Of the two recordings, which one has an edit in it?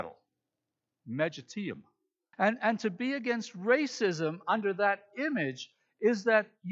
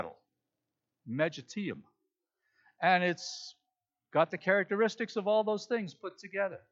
first; 1 cut; at 2.3 s

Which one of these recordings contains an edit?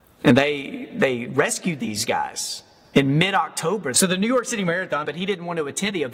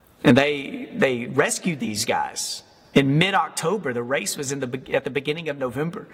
first; 2 cuts; at 3.9 s, 5.0 s

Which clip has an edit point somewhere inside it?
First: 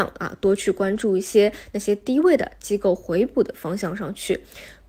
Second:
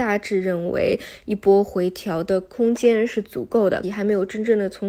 second; 1 cut; at 3.8 s

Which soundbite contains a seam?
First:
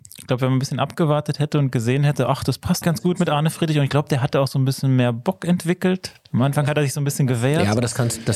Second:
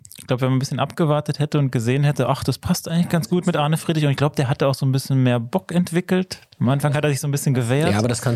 first; 1 cut; at 2.8 s

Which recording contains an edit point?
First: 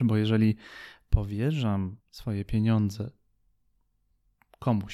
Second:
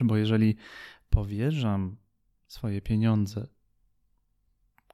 first; 1 cut; at 2.0 s

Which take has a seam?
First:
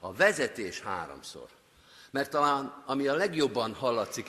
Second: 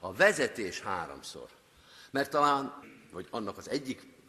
second; 1 cut; at 2.8 s

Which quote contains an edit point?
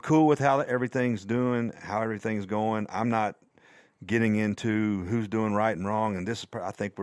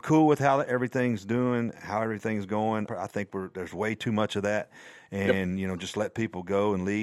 second; 1 cut; at 2.9 s

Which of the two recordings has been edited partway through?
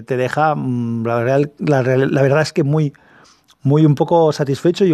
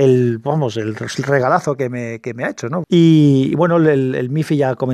second; 1 cut; at 2.8 s

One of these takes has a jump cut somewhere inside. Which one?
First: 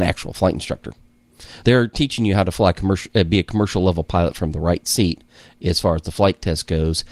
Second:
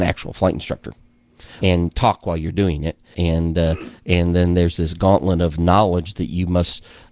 second; 2 cuts; at 1.6 s, 3.1 s

